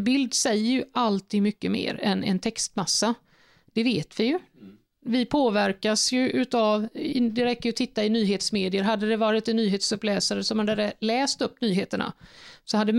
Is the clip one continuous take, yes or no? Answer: yes